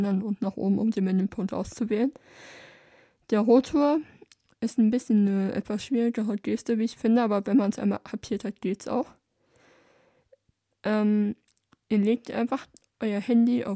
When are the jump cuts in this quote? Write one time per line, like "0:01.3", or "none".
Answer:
none